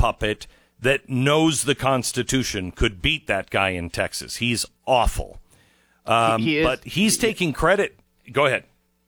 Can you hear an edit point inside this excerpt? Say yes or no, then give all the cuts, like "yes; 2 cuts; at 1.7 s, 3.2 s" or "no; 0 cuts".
no; 0 cuts